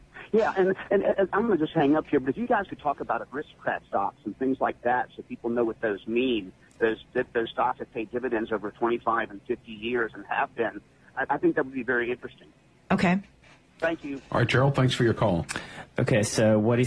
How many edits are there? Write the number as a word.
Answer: one